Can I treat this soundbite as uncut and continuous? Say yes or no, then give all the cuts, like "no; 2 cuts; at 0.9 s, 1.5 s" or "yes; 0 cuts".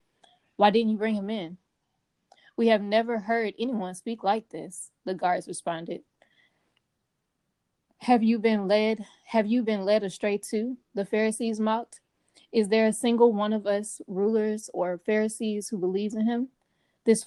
yes; 0 cuts